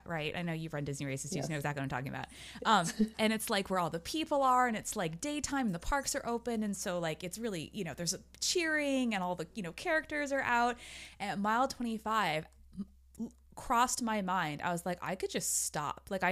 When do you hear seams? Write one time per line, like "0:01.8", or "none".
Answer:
0:03.1